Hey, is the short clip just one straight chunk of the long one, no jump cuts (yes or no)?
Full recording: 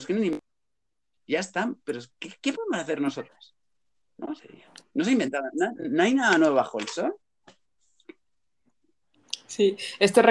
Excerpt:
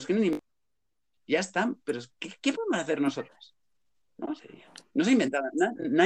yes